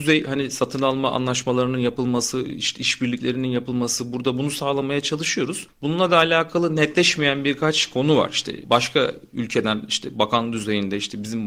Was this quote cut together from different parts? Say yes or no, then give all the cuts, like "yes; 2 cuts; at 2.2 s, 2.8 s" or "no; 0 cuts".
no; 0 cuts